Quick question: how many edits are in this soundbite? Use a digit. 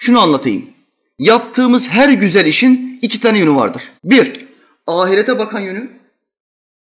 1